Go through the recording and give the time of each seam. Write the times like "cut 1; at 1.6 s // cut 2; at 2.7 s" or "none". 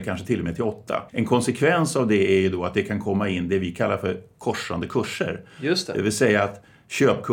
cut 1; at 1.1 s